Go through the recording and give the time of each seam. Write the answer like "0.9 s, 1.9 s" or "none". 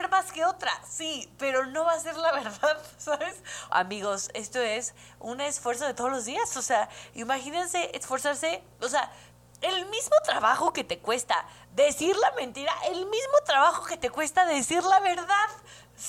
3.7 s